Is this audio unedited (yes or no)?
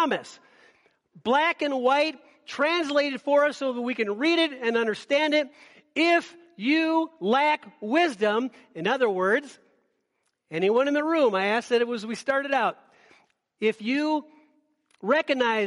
yes